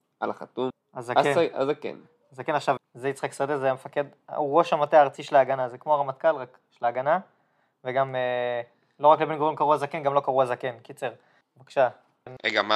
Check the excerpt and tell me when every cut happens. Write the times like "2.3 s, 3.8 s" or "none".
2.8 s, 11.4 s